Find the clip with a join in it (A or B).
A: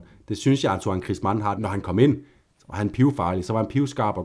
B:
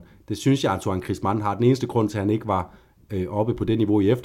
A